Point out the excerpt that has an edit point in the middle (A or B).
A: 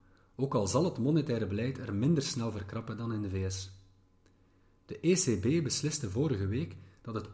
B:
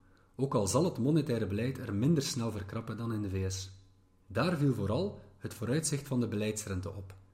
B